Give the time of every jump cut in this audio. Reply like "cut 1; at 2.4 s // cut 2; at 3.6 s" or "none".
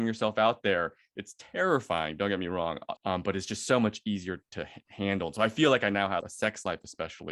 cut 1; at 3.0 s // cut 2; at 6.2 s